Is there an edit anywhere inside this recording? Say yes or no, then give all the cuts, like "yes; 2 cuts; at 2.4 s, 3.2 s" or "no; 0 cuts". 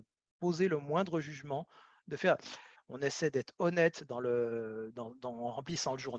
yes; 1 cut; at 2.8 s